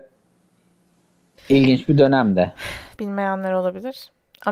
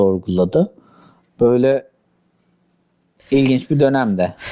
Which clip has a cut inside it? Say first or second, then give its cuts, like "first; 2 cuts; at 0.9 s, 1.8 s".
first; 1 cut; at 3.0 s